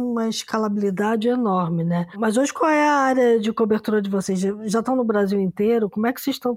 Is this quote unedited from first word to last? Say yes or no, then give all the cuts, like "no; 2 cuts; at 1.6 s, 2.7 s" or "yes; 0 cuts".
yes; 0 cuts